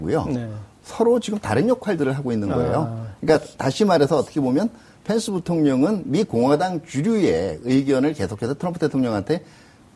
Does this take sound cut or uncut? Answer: uncut